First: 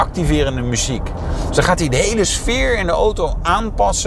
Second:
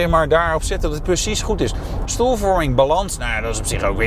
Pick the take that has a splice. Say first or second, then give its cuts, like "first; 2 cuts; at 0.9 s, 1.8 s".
second; 1 cut; at 2.1 s